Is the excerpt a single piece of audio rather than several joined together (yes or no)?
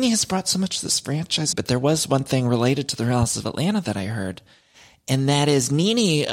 no